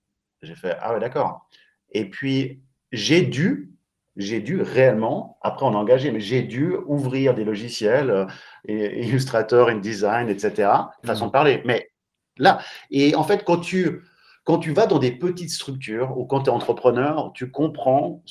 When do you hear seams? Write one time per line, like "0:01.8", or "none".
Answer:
0:11.0